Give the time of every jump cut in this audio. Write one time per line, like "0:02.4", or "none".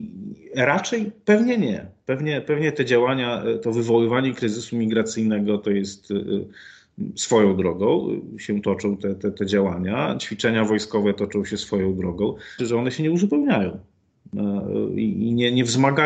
0:12.6